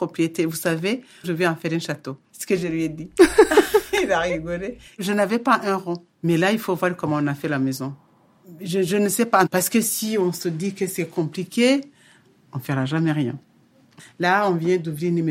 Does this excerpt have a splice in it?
yes; 2 cuts; at 1.2 s, 9.5 s

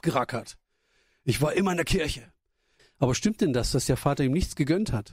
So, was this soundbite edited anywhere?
yes; 1 cut; at 2.8 s

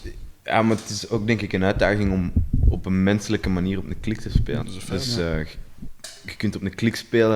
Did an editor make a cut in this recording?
yes; 1 cut; at 4.6 s

